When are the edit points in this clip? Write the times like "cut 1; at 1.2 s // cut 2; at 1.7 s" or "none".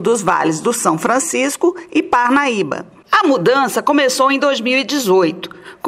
cut 1; at 3.0 s